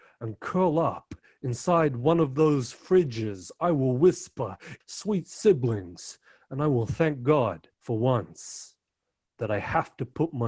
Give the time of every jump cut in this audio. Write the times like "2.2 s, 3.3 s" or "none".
4.8 s, 7.7 s